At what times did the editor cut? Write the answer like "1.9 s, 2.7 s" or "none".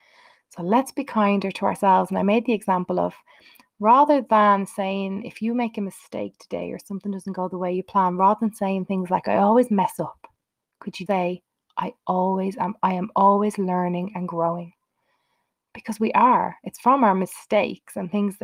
11.1 s